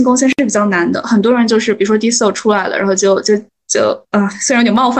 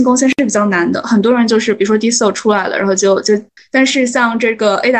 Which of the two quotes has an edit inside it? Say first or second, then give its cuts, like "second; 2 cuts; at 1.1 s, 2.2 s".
second; 1 cut; at 3.6 s